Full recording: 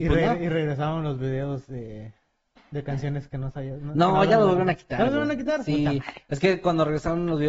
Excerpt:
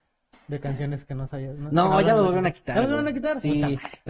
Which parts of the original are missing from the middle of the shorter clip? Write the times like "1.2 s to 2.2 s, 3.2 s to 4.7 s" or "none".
none